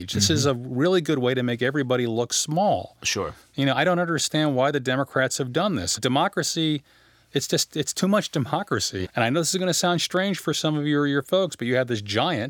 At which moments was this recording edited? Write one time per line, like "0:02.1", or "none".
0:06.0
0:09.0